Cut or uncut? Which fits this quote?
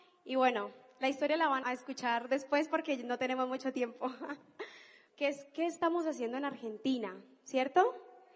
cut